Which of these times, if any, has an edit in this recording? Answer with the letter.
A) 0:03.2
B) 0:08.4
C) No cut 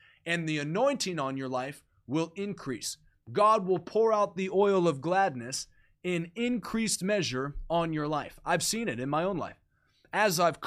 C